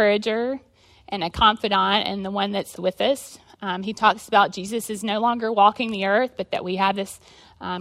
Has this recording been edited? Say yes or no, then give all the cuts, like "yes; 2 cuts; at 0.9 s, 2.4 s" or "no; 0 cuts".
yes; 1 cut; at 2.8 s